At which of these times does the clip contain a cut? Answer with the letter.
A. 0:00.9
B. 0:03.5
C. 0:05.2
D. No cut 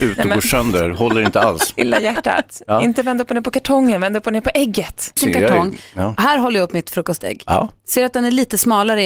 C